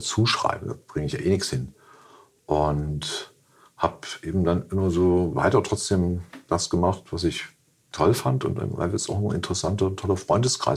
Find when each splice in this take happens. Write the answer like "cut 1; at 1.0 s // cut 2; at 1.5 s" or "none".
none